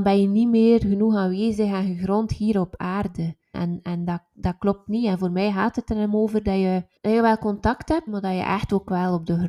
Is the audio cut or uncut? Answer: cut